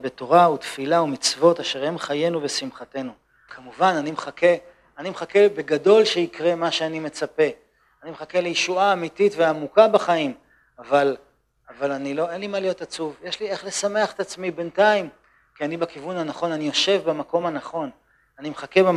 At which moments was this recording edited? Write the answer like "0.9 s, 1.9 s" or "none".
3.5 s